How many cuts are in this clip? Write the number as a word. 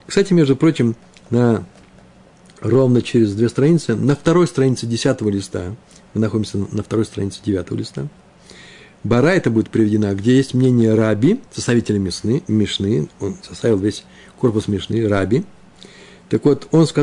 one